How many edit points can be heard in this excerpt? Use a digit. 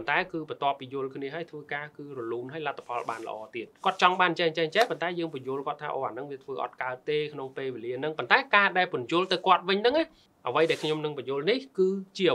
1